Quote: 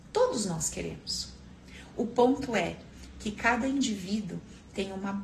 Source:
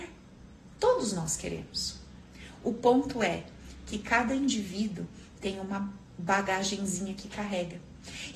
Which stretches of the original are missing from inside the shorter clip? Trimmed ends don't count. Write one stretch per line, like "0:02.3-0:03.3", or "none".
none